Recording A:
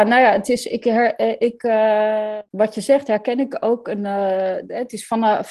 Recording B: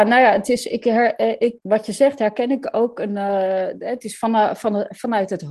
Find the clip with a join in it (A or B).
B